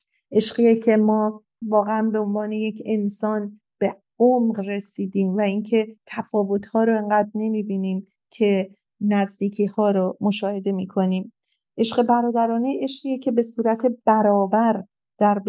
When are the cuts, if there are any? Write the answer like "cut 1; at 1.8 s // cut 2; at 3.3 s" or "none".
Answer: cut 1; at 1.6 s